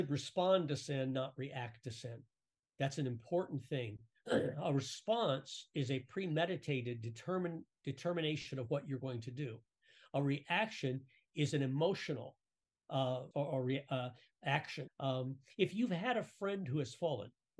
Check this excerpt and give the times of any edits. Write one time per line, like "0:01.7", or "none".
0:13.3
0:14.9